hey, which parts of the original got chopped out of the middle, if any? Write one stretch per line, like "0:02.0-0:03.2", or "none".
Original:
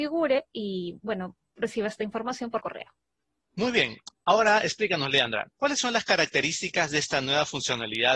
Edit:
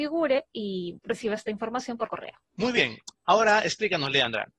0:01.0-0:01.5
0:03.0-0:03.4